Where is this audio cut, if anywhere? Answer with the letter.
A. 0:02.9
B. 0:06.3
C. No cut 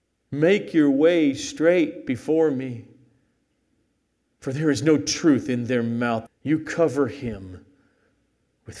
B